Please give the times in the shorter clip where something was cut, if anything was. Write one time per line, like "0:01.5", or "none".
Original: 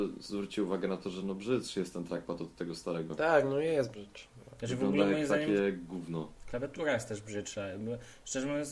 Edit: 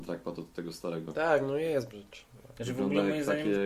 none